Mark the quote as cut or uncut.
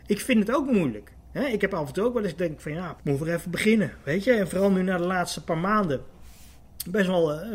cut